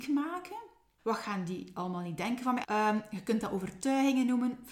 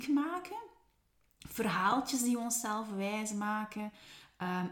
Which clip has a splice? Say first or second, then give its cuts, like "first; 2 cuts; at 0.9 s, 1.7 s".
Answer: first; 2 cuts; at 1.0 s, 2.6 s